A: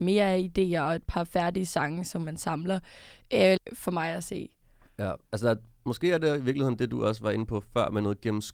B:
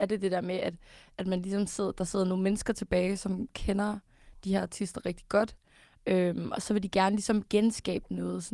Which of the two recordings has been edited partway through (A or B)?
A